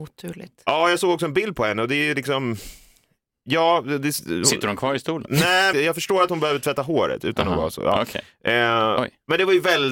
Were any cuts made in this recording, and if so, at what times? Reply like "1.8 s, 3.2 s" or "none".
5.7 s